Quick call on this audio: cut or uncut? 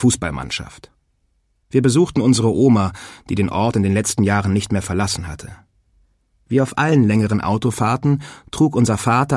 uncut